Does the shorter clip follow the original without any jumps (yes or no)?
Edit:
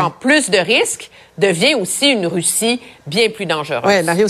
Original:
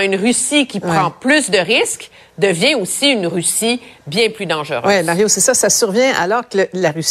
yes